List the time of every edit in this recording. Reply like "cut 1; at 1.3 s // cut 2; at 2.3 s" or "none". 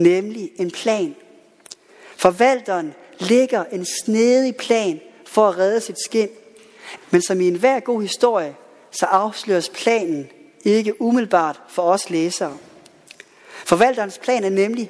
cut 1; at 7.0 s